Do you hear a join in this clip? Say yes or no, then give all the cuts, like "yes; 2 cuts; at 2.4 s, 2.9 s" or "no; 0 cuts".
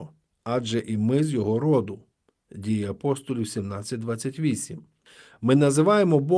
no; 0 cuts